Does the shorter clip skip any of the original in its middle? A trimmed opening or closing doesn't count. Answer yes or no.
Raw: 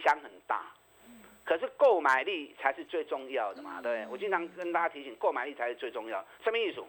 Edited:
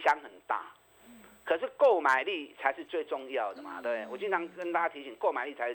no